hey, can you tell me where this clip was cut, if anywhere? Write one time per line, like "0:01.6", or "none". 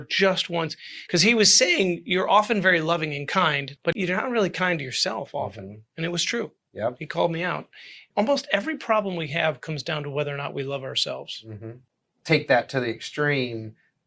none